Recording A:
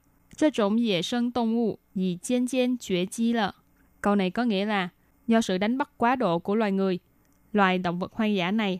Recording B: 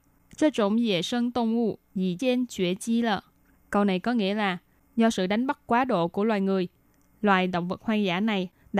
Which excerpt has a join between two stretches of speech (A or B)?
B